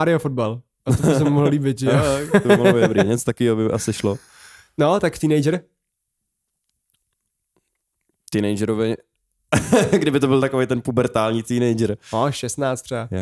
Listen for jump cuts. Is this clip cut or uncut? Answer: uncut